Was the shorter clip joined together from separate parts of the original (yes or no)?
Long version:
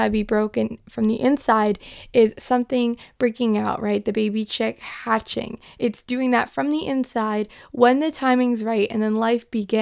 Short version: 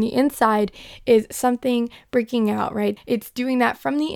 yes